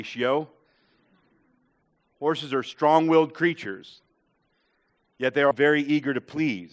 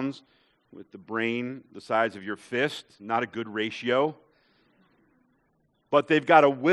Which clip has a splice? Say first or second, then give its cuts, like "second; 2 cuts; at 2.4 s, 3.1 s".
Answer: first; 2 cuts; at 2.0 s, 5.5 s